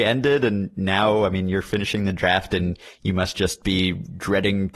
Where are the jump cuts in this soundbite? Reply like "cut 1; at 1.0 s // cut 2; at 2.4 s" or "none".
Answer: none